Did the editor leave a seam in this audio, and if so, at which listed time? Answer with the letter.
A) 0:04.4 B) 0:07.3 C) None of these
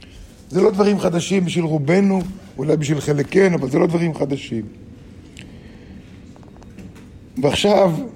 C